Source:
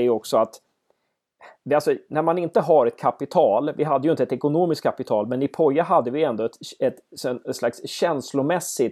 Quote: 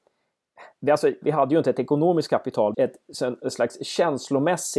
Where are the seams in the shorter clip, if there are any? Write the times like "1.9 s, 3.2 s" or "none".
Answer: 1.2 s, 2.7 s